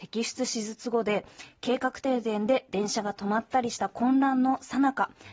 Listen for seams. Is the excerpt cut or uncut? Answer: uncut